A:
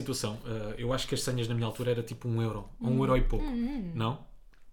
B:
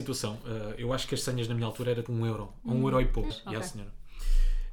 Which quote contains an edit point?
B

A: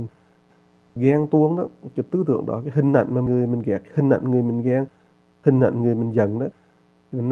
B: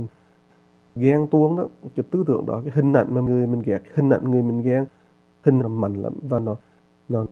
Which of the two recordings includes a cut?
B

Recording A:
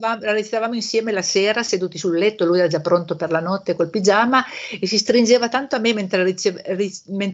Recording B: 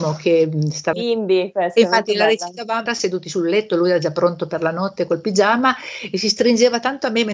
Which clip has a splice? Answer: B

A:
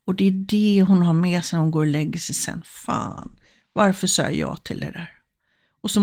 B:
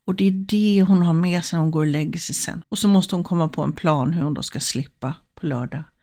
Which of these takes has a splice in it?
B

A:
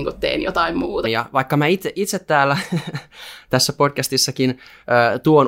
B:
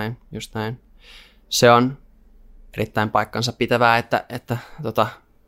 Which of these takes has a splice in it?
A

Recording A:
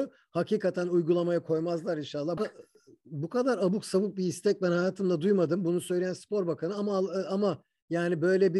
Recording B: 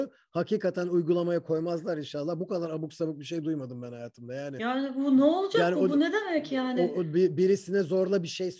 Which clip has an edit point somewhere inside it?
A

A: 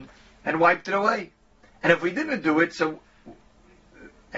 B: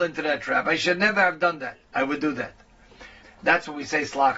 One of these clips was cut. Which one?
B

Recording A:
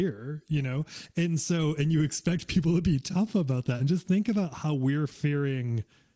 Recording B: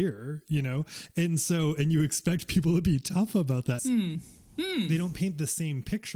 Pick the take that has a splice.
B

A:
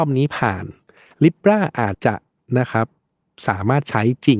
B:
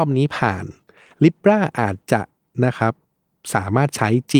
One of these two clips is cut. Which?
A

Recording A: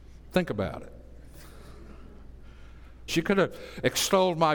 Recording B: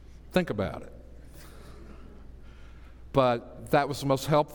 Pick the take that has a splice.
A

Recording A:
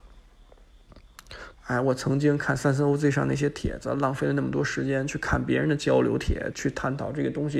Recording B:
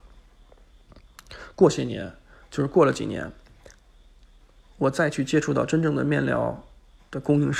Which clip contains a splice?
A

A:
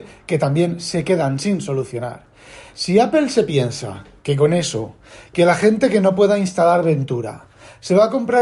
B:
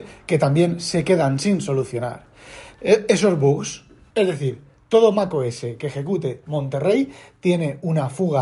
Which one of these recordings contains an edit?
B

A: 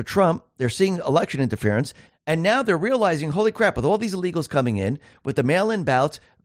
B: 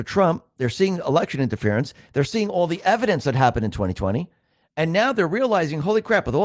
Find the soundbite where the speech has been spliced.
A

